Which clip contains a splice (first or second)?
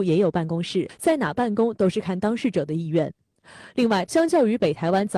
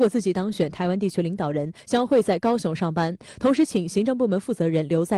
first